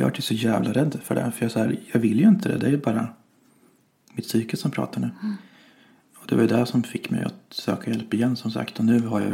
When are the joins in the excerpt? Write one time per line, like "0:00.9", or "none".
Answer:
none